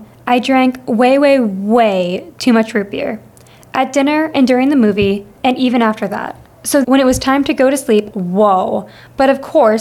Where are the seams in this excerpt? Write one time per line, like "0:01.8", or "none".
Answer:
0:06.8
0:08.1

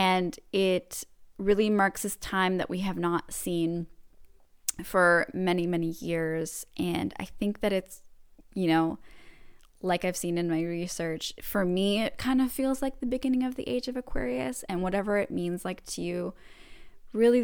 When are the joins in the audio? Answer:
none

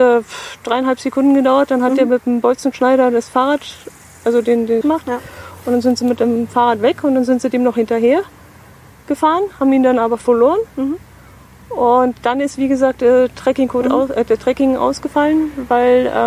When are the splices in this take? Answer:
0:04.8

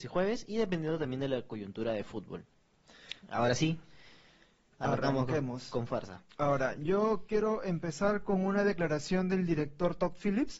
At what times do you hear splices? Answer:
none

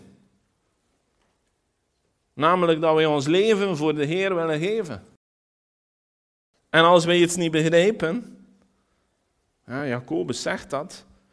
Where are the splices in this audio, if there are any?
none

